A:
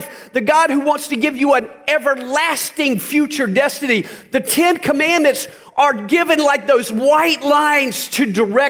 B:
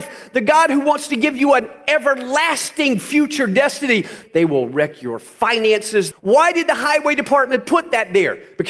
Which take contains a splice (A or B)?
B